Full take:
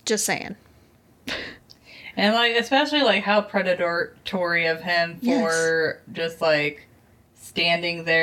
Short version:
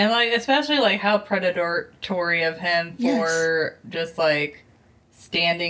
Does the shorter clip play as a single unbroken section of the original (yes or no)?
yes